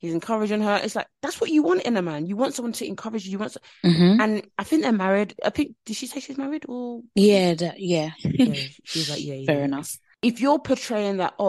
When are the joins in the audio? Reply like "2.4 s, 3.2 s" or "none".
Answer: 8.1 s